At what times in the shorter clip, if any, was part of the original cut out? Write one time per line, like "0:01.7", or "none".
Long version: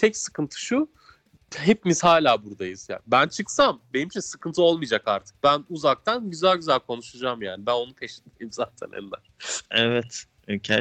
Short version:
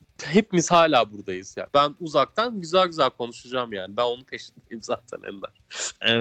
0:01.7